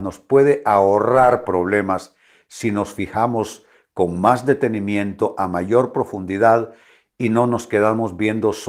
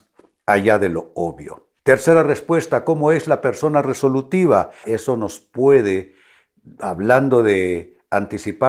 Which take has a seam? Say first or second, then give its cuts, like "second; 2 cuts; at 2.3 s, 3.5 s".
second; 2 cuts; at 1.8 s, 4.8 s